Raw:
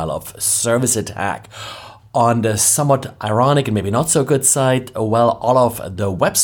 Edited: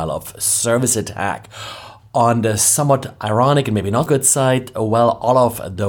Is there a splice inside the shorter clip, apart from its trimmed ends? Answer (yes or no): yes